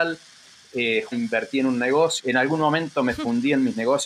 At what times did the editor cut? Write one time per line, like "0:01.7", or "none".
0:01.1
0:02.2

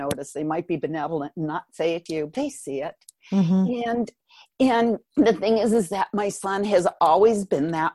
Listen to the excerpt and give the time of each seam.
none

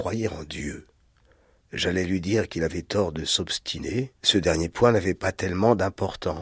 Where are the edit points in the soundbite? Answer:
0:01.6
0:04.2

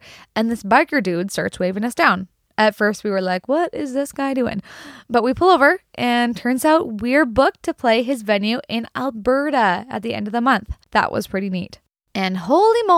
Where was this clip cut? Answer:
0:10.8

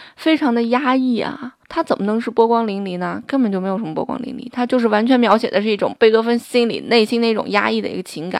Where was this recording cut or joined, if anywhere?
0:01.6

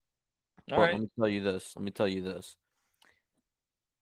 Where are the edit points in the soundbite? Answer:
none

